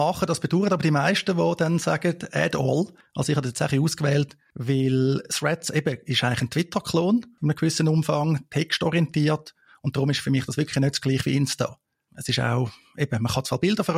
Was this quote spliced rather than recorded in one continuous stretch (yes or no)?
no